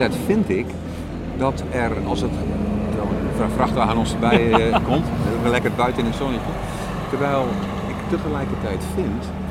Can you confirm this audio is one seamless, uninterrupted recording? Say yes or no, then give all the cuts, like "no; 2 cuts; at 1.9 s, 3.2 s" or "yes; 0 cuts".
yes; 0 cuts